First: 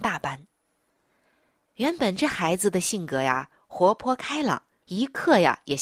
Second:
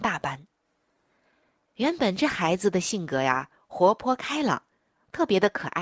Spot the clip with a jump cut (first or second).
first